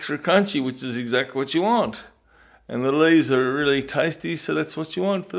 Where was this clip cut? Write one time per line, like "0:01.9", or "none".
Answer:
none